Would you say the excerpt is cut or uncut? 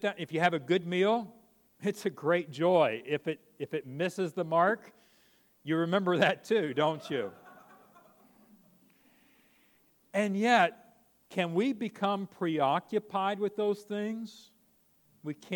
uncut